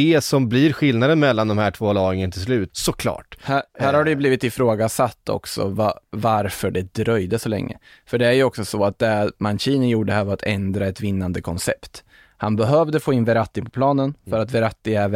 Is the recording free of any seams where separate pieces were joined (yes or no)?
no